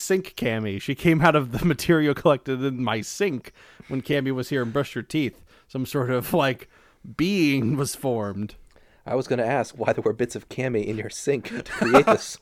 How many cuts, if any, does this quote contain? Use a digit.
0